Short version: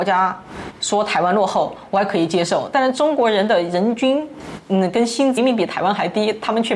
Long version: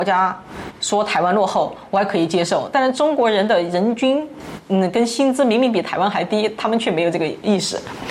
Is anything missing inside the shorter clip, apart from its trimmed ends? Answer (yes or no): yes